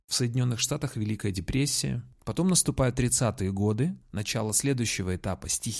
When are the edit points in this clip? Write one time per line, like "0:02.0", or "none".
0:02.1
0:04.0

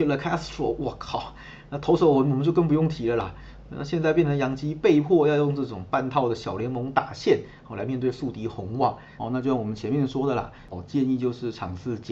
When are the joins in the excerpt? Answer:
0:09.2
0:10.7

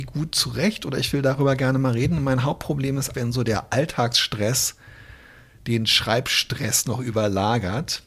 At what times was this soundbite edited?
0:03.1

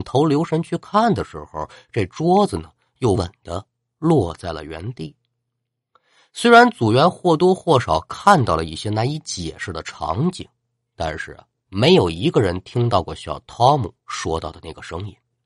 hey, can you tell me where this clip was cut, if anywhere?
0:03.1

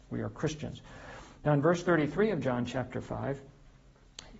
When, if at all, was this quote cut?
none

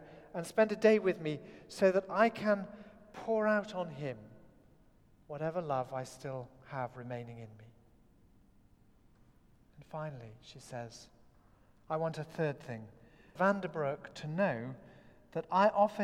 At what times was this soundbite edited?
0:13.4

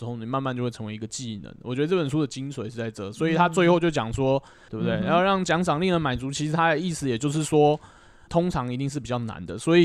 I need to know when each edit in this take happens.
0:04.7
0:08.3

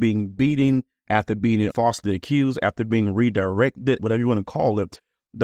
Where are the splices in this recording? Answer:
0:01.7
0:04.0

